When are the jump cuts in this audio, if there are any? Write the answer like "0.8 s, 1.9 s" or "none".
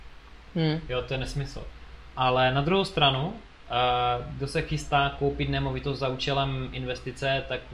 none